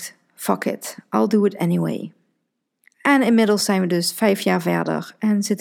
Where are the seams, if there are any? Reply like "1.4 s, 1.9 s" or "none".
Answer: none